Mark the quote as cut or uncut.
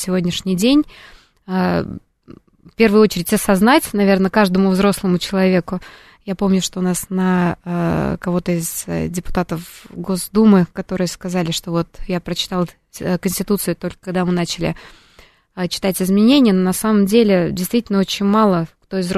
uncut